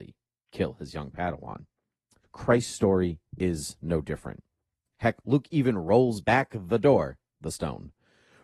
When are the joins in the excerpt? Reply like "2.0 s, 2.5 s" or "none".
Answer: 2.2 s, 4.9 s